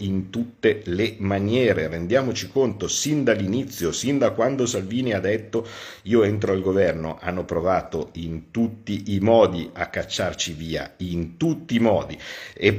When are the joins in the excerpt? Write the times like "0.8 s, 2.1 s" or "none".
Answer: none

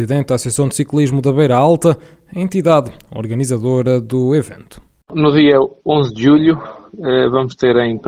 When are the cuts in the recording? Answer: none

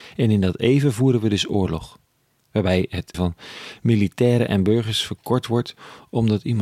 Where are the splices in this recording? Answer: 3.1 s

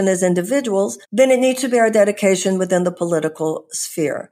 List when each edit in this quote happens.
1.0 s

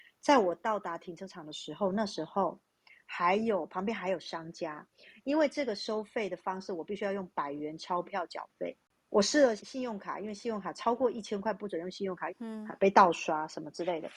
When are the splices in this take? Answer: 9.6 s, 12.3 s

